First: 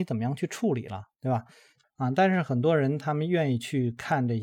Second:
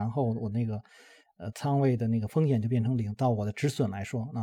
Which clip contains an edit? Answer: first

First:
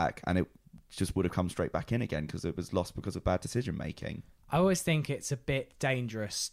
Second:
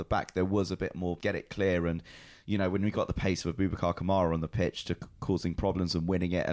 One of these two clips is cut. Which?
second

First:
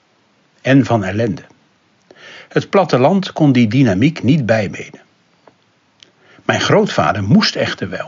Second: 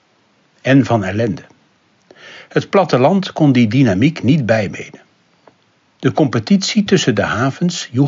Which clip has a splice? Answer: second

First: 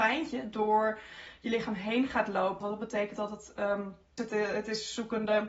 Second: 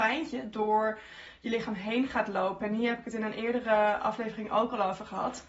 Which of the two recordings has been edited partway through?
first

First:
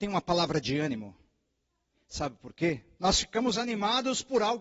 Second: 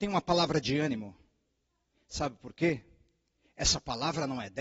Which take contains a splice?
first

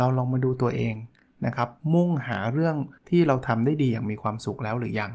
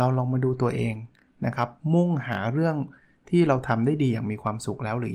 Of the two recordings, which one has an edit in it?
first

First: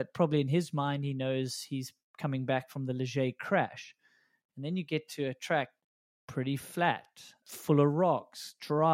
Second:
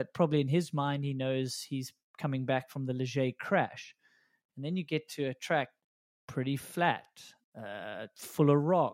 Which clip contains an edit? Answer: first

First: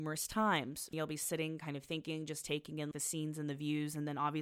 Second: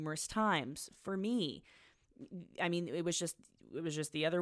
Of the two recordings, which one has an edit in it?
first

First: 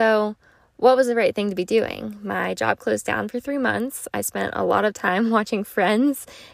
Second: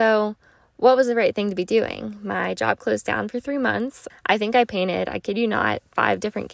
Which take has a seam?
second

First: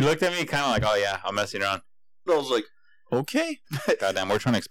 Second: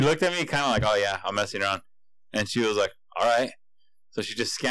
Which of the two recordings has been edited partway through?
first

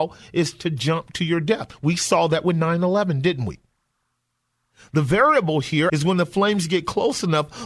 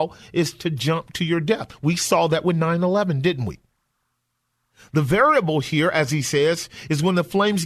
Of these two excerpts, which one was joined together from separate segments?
first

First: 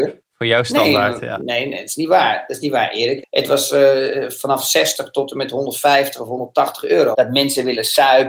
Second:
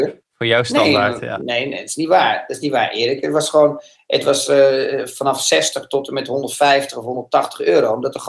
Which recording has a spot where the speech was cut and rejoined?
first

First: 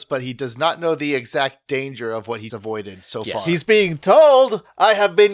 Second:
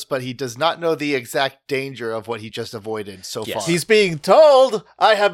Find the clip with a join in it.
first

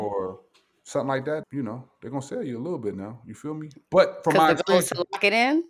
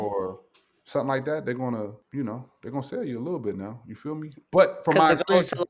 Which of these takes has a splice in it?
first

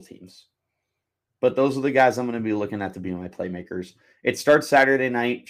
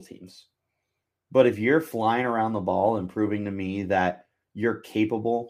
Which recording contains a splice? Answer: second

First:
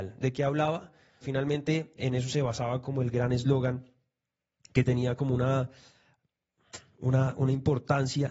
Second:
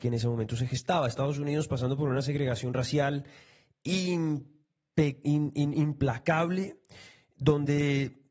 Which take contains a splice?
first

